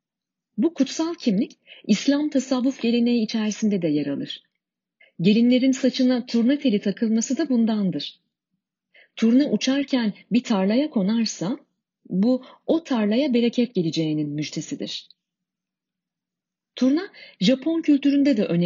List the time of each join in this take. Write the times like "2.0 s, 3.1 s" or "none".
5.0 s